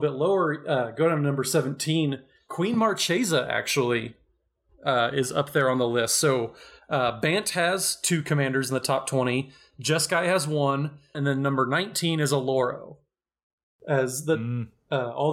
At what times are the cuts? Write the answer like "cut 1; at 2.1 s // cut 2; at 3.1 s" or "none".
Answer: cut 1; at 11.1 s